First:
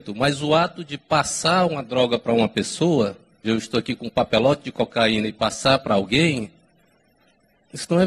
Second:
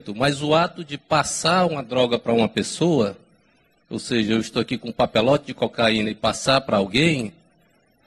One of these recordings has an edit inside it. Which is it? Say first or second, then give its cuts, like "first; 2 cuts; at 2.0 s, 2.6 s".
first; 1 cut; at 3.4 s